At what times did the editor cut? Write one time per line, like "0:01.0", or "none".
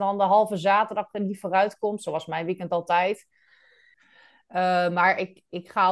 0:03.9